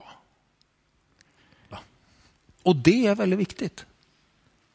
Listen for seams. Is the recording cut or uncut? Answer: cut